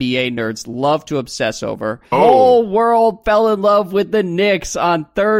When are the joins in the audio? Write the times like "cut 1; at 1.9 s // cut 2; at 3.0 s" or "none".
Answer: cut 1; at 2.1 s